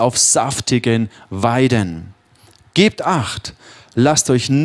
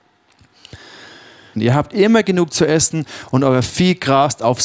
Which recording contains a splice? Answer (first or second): second